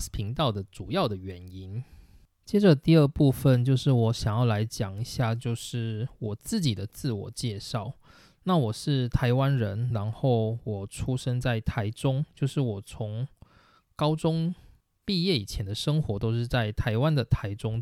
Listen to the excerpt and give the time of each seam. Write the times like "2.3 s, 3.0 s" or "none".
none